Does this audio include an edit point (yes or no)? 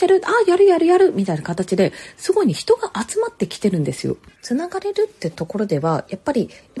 yes